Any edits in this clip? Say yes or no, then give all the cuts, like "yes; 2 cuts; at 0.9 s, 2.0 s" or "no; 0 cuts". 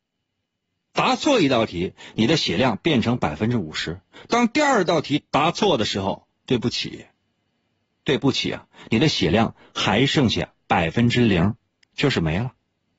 no; 0 cuts